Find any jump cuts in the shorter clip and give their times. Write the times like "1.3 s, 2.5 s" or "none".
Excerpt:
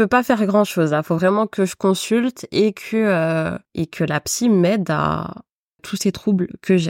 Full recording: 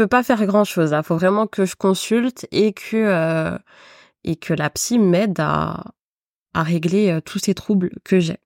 3.6 s, 5.8 s